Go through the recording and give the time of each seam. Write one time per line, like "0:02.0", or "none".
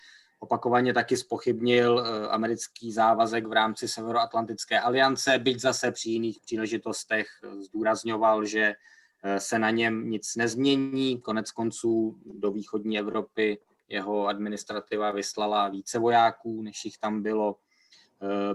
none